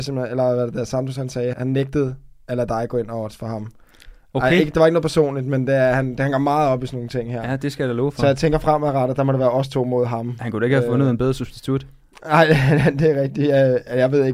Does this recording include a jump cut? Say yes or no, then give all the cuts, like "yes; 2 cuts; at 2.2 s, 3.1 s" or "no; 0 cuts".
yes; 1 cut; at 1.5 s